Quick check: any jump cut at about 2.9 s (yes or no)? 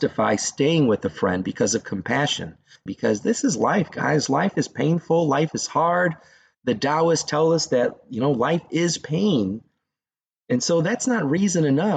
yes